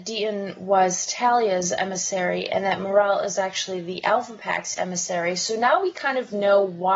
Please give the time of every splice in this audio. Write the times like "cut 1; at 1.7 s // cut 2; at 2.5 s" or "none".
none